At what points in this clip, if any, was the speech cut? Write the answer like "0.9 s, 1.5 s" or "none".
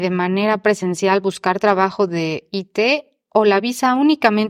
none